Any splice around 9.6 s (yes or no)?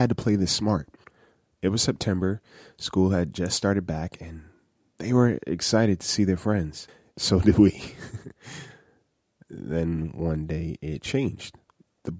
no